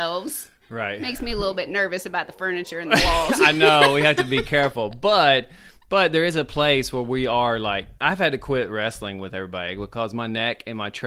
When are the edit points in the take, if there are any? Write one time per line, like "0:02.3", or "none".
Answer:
0:08.0